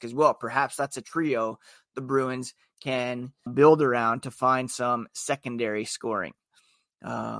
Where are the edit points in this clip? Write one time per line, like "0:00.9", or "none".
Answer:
0:03.5